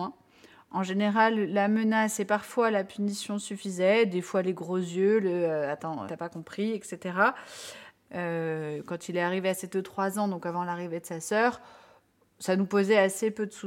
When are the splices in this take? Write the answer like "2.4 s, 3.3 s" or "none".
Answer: 6.1 s, 8.0 s